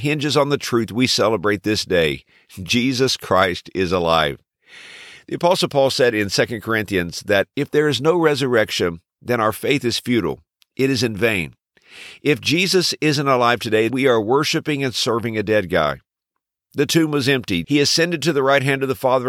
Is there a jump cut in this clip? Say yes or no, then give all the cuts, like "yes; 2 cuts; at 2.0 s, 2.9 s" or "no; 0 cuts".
yes; 3 cuts; at 13.9 s, 16.6 s, 17.6 s